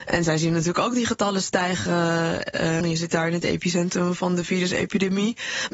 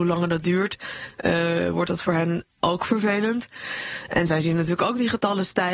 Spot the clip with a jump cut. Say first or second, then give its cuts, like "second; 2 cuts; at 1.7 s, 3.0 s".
first; 1 cut; at 2.8 s